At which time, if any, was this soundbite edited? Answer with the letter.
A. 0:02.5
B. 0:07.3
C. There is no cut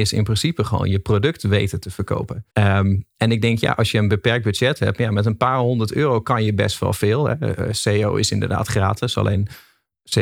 A